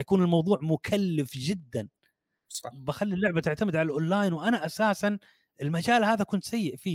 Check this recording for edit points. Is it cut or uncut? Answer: cut